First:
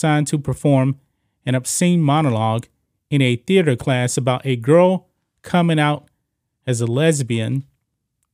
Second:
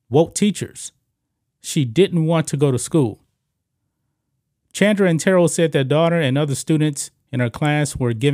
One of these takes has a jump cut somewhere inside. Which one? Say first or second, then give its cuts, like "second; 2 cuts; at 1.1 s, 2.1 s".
second; 1 cut; at 1.5 s